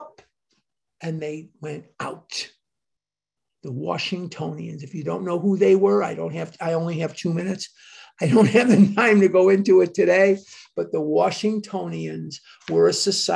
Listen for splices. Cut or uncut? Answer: cut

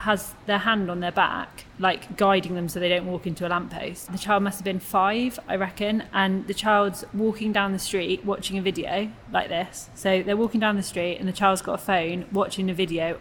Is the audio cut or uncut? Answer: cut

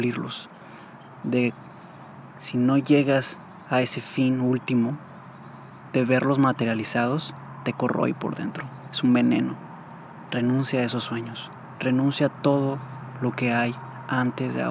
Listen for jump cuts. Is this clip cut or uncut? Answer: uncut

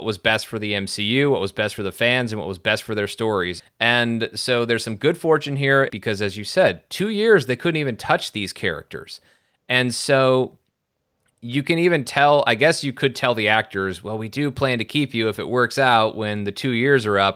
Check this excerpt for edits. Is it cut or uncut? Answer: cut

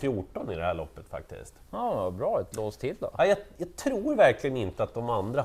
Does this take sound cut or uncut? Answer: uncut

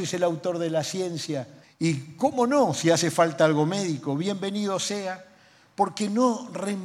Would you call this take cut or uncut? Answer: cut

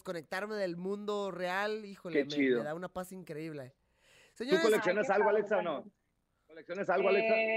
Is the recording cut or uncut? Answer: uncut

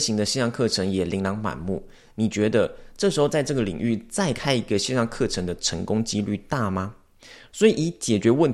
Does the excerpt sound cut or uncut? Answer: cut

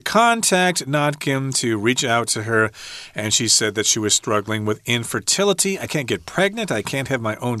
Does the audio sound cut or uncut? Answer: cut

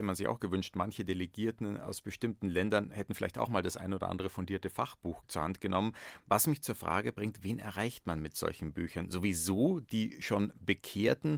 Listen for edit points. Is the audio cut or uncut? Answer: uncut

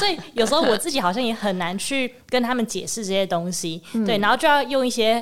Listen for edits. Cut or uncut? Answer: uncut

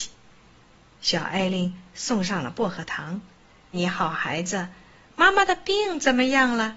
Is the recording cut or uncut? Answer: cut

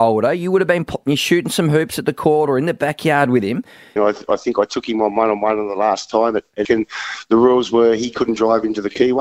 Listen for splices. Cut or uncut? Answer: cut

